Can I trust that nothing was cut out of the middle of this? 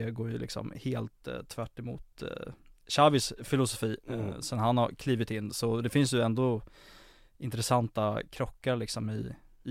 yes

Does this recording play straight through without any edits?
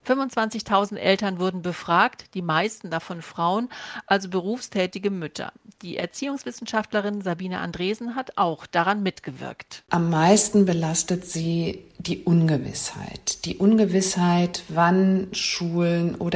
yes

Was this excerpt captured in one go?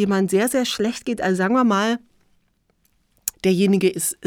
no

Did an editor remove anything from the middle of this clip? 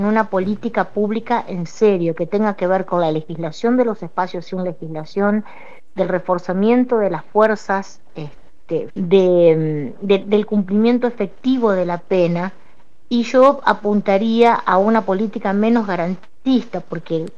yes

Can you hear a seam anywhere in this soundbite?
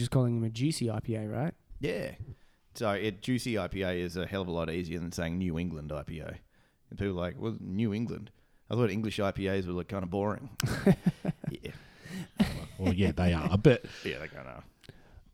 no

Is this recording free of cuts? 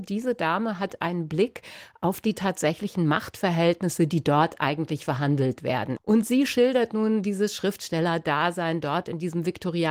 no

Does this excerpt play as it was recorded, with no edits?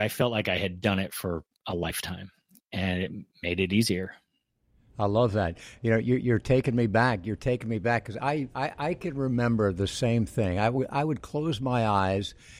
yes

